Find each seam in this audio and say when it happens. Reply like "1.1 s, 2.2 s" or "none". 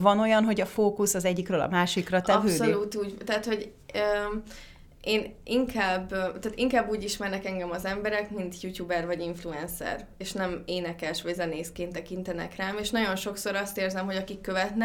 none